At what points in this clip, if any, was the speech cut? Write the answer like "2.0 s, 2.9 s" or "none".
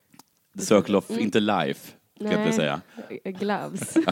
none

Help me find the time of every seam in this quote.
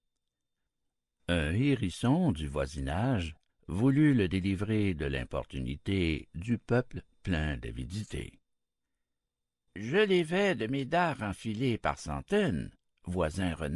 3.5 s

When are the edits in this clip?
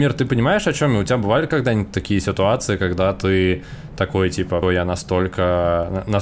4.6 s

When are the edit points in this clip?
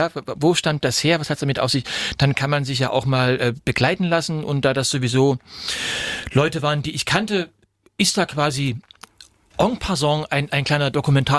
none

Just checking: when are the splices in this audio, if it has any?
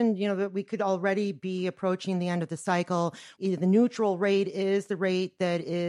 3.4 s

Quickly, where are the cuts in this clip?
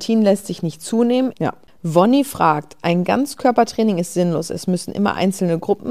1.3 s

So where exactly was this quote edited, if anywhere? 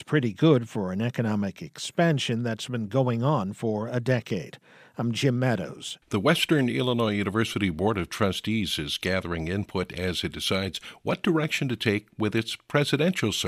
6.0 s

